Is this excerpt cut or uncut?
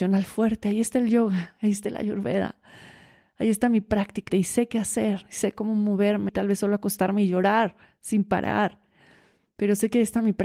cut